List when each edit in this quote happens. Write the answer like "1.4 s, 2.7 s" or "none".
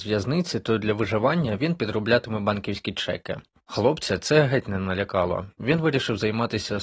3.5 s